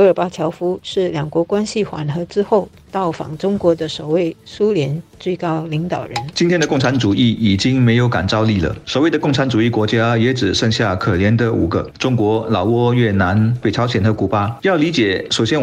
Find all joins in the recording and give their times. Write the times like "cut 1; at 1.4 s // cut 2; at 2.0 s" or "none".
cut 1; at 14.6 s